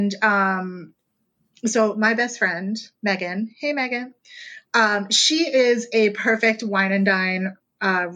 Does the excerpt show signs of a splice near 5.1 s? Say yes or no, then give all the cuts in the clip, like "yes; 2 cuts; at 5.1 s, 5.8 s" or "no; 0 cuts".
no; 0 cuts